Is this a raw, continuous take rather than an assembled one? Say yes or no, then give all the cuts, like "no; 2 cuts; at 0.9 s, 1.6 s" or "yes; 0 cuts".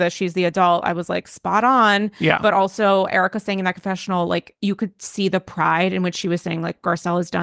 yes; 0 cuts